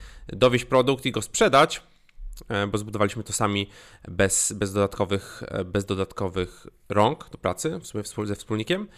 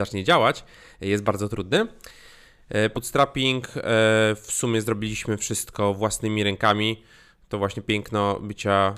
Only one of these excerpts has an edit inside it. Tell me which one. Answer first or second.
second